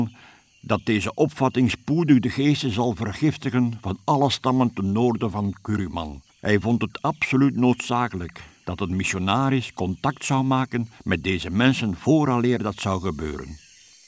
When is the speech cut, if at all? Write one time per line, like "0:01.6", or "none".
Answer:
0:06.3
0:11.0